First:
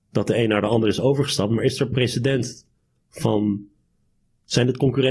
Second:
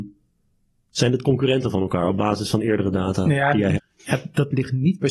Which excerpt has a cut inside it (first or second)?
second